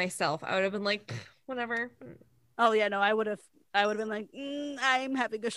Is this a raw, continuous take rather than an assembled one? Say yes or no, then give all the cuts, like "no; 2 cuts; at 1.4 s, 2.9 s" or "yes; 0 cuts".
yes; 0 cuts